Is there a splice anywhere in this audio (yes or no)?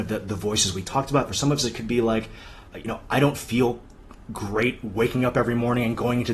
yes